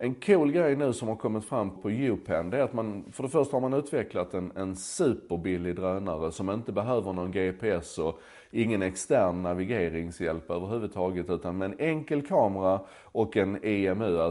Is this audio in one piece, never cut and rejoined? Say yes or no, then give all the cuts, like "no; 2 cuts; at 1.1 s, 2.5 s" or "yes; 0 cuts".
no; 1 cut; at 1.8 s